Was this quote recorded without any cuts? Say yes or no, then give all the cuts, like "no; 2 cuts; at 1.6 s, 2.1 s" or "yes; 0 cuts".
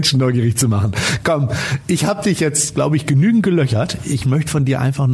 yes; 0 cuts